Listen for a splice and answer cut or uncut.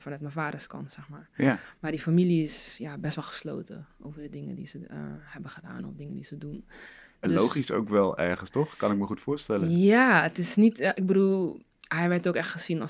uncut